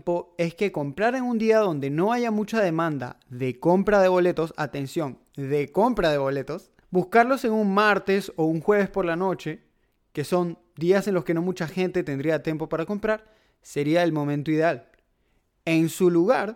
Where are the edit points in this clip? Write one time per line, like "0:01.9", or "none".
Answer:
0:06.8